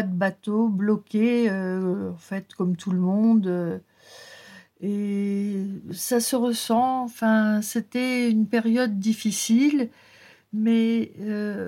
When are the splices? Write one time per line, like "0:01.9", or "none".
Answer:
none

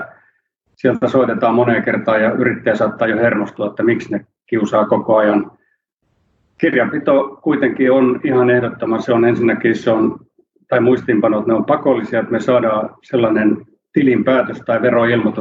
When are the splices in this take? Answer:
none

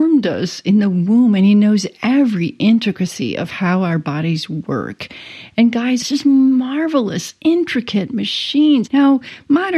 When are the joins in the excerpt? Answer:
0:06.0
0:08.9

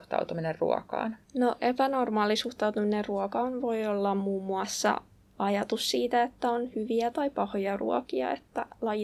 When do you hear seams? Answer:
0:01.2

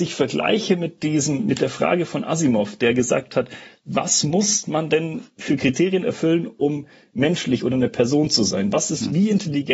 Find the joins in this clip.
none

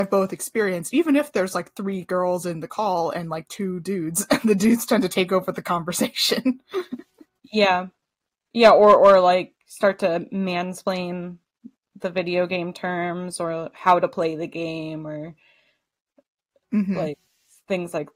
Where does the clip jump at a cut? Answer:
none

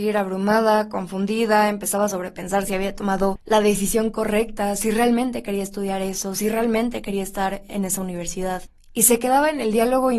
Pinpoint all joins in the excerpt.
none

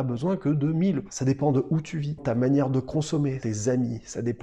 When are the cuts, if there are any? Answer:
0:02.2

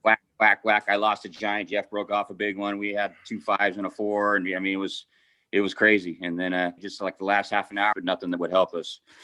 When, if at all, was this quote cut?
0:06.8
0:07.9

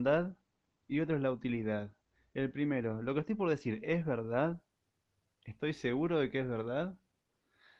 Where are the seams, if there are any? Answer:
none

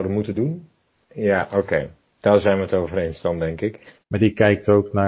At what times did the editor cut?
0:01.1
0:04.0

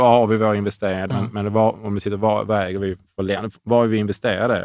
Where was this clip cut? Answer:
0:01.1

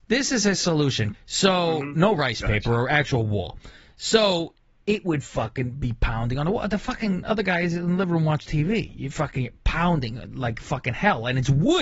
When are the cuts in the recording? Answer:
0:01.1

